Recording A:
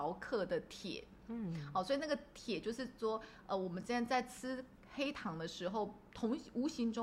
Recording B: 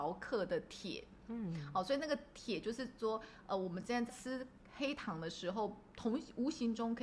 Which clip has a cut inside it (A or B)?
B